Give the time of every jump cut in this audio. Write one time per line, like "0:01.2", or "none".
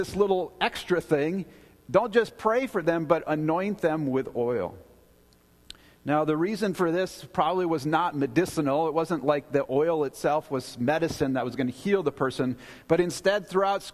none